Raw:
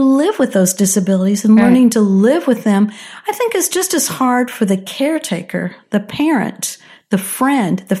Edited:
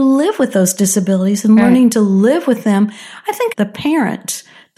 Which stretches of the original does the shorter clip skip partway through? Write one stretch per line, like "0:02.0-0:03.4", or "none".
0:03.5-0:05.9